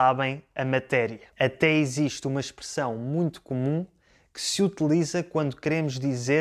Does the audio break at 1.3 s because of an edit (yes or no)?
yes